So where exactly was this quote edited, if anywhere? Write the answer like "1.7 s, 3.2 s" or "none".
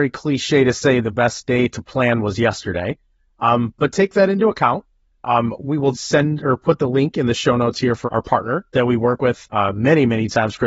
5.9 s, 8.1 s